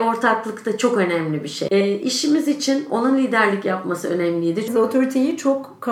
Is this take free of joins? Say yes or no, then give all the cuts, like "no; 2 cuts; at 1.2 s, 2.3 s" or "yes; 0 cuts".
no; 2 cuts; at 1.7 s, 4.7 s